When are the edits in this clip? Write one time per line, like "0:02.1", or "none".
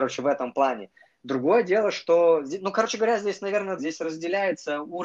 0:03.8